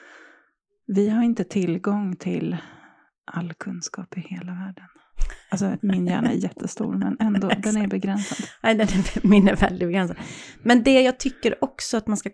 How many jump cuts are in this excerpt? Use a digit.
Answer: 0